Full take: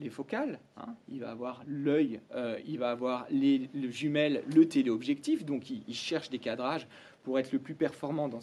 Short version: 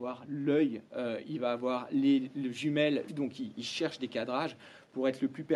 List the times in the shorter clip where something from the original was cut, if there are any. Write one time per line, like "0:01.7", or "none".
0:03.1